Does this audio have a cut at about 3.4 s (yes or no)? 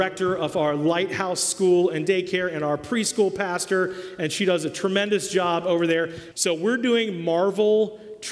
no